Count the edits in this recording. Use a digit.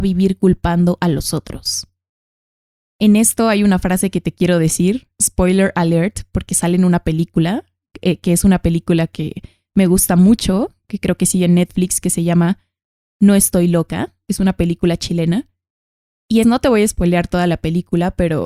1